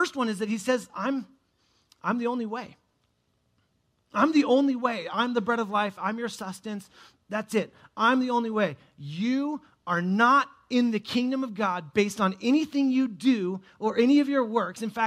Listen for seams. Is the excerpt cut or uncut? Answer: uncut